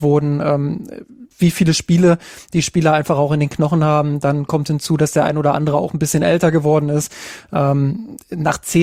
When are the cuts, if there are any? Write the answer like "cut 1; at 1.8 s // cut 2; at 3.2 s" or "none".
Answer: cut 1; at 1.3 s